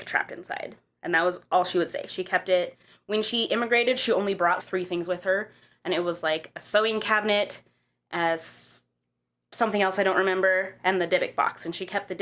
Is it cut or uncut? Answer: cut